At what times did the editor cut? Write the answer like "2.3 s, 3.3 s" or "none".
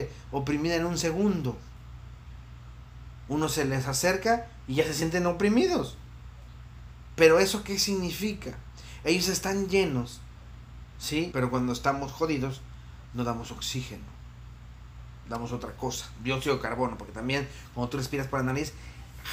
11.3 s

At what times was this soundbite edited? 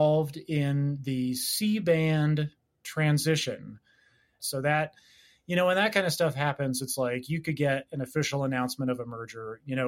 4.4 s

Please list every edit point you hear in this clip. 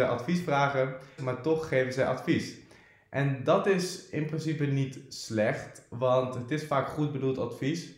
1.2 s

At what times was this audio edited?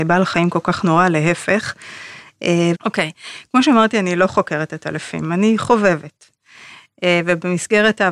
2.7 s

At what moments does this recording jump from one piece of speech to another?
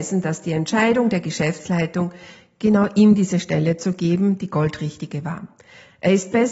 none

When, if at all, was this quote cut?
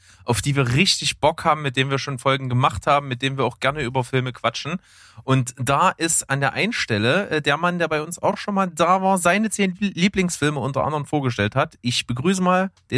none

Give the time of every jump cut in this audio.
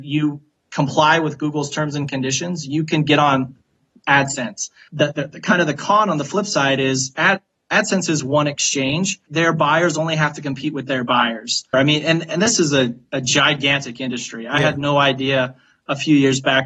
4.9 s, 9.3 s, 11.7 s

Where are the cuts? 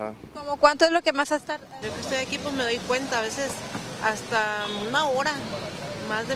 1.8 s

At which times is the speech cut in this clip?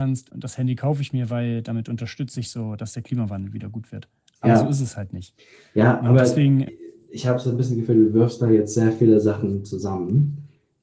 6.7 s

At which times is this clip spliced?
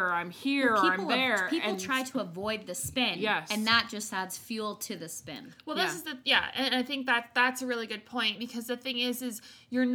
none

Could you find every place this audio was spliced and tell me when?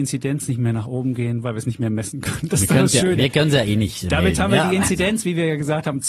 none

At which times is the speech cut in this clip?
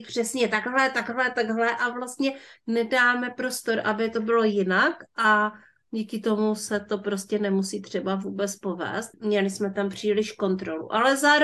9.1 s

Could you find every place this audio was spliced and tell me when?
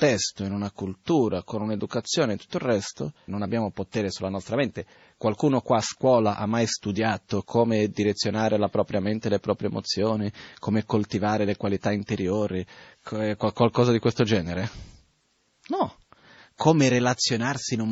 3.3 s, 7.4 s

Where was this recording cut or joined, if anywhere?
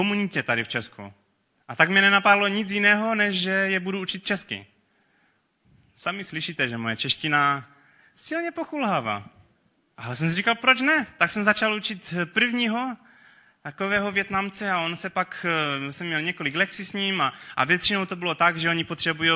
none

